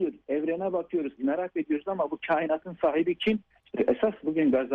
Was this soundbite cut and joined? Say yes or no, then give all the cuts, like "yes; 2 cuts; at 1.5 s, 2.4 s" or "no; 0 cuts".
yes; 2 cuts; at 1.2 s, 3.5 s